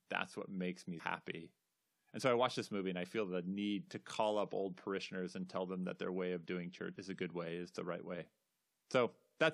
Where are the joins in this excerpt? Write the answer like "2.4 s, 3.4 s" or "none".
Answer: 1.0 s, 7.0 s